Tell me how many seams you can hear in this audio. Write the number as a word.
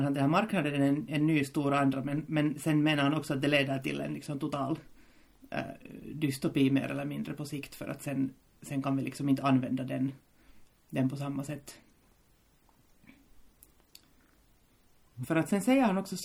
one